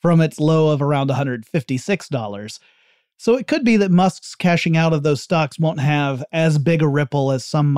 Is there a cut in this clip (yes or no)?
no